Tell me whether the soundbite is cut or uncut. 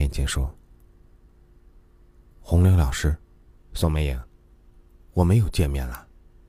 cut